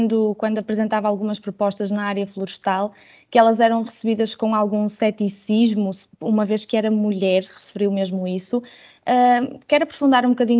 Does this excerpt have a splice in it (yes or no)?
no